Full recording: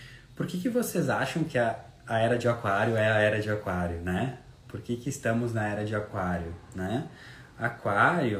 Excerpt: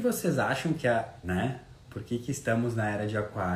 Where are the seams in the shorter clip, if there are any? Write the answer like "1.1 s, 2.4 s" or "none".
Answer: 1.2 s

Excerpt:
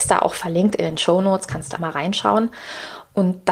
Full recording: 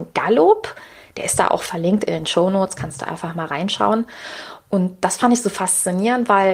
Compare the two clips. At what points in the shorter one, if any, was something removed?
1.8 s

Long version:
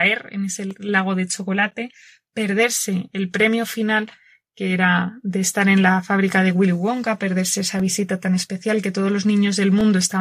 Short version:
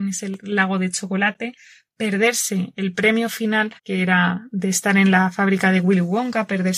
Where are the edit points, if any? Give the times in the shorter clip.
3.8 s

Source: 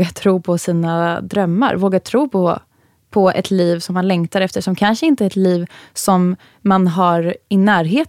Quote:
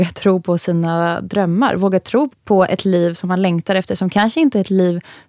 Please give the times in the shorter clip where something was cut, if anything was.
2.3 s

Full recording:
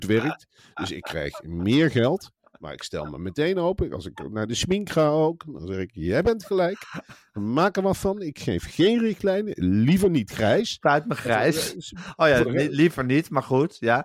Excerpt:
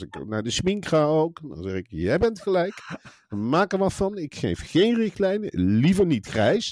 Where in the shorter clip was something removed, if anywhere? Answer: none

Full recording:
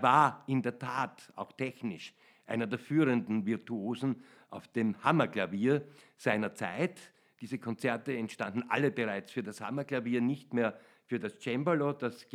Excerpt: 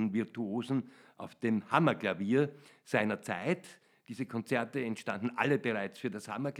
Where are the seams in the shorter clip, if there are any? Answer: none

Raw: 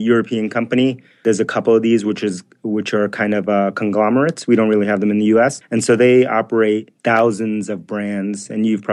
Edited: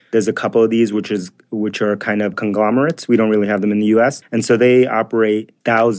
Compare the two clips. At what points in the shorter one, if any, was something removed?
2.3 s

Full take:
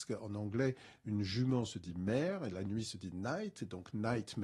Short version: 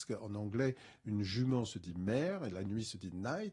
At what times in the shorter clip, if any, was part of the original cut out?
none

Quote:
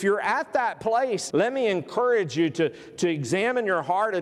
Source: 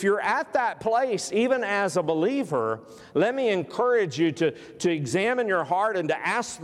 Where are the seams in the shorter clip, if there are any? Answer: 1.3 s

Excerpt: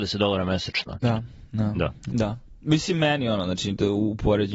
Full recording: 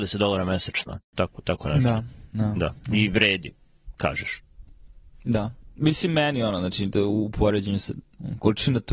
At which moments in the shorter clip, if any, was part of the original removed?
1.0 s, 2.1 s

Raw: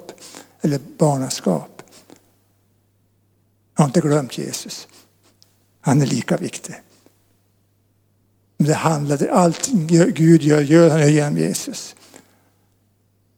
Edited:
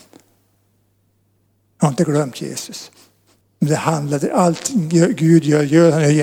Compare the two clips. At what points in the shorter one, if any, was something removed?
3.4 s

